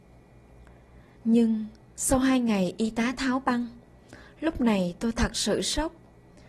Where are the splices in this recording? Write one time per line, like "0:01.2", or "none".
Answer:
0:01.1